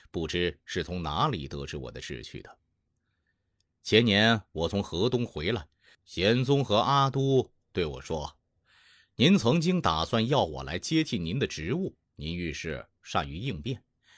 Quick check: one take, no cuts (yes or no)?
no